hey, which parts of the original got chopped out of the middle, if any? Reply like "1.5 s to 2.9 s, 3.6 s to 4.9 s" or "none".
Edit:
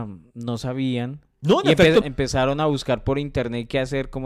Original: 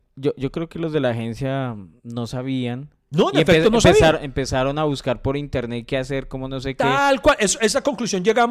3.7 s to 4.2 s